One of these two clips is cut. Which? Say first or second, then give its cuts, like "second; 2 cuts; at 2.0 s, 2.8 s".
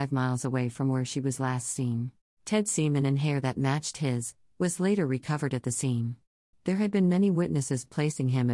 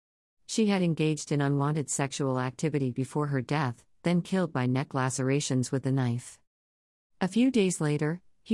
first; 2 cuts; at 2.4 s, 6.5 s